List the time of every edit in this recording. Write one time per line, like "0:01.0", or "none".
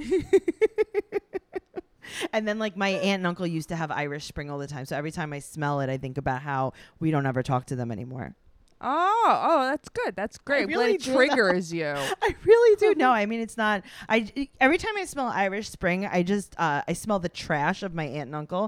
none